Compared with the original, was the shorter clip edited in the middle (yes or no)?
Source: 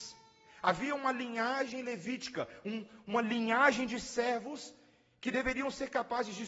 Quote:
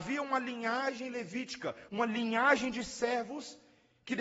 yes